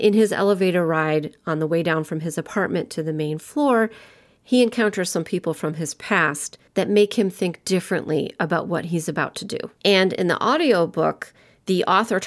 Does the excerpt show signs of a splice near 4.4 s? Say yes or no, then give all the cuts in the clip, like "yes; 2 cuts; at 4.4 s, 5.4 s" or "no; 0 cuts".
no; 2 cuts; at 6.7 s, 9.8 s